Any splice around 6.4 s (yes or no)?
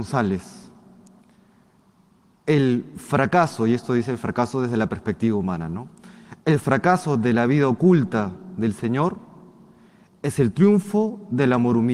no